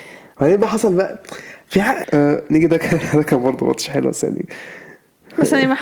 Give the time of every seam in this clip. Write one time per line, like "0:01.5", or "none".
0:02.0